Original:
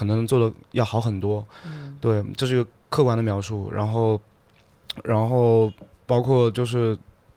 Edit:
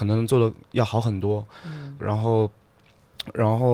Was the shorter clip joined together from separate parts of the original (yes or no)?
yes